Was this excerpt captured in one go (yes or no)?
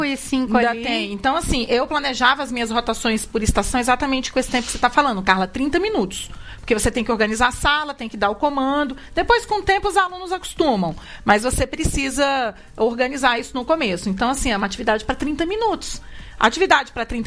yes